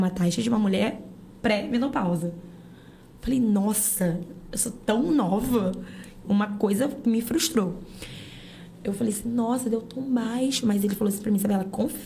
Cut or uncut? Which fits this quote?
cut